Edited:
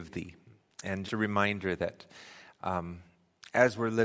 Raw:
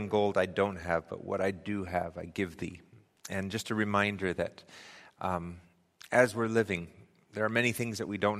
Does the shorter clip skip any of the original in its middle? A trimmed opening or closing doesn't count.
yes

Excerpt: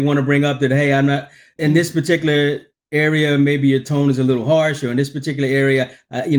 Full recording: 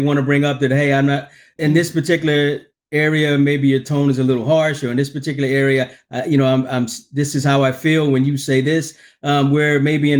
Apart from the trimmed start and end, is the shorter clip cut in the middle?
no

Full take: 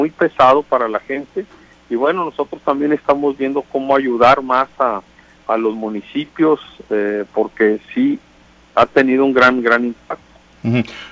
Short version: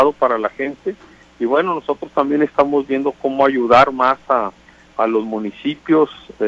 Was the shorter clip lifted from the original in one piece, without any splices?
yes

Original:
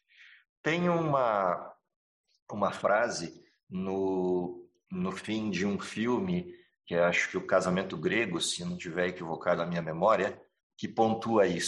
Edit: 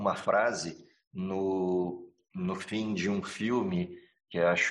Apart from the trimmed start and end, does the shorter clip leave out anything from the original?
no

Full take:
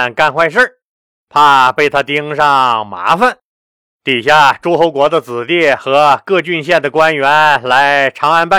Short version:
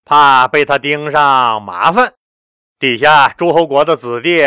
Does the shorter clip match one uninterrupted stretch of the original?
yes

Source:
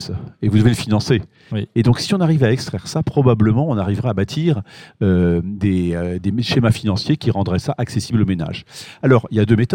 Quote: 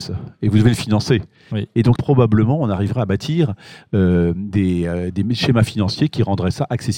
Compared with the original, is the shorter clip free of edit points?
no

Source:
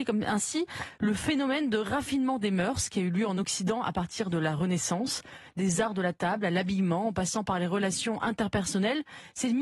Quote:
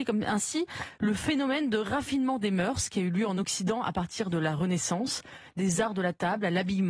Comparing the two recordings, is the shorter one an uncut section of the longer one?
yes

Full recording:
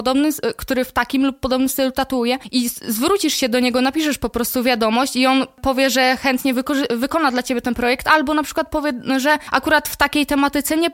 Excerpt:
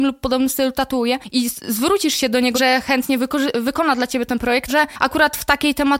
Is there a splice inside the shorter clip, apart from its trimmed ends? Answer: yes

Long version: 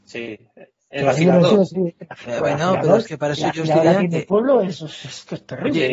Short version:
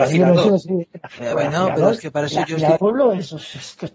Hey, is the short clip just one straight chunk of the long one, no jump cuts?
no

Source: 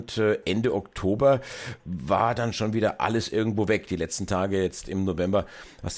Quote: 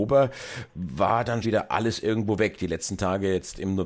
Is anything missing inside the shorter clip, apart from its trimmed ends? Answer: yes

